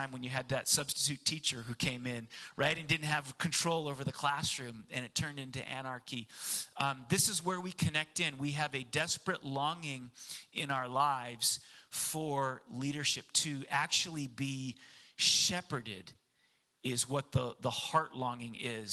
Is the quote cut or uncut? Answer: uncut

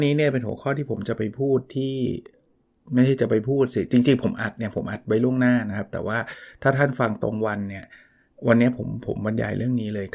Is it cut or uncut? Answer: uncut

